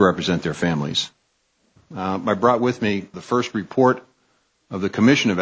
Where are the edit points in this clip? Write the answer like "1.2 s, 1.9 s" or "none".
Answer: 1.8 s, 3.1 s

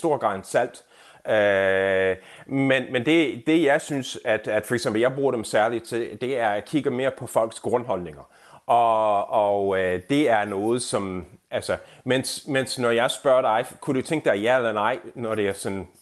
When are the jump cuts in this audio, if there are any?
none

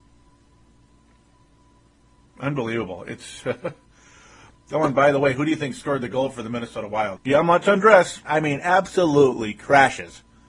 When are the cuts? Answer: 7.2 s, 8.3 s

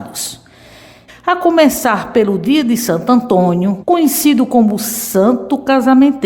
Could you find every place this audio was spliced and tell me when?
1.1 s, 3.8 s

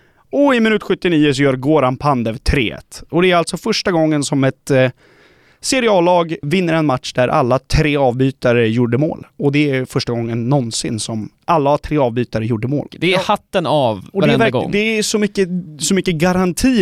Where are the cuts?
6.4 s, 12.9 s

